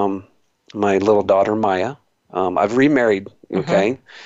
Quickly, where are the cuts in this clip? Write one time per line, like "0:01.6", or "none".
none